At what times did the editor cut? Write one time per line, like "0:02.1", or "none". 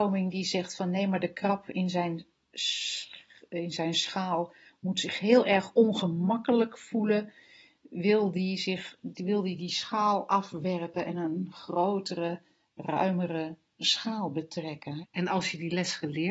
0:15.0